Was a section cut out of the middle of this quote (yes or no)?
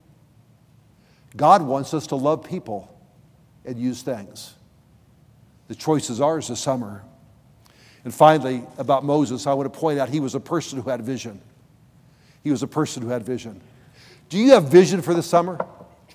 no